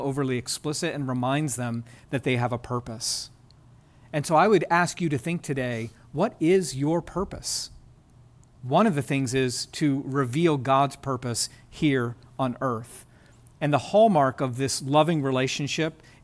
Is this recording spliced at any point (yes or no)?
no